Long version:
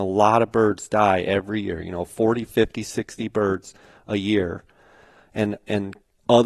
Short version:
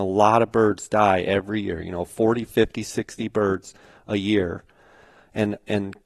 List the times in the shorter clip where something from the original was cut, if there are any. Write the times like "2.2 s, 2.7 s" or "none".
none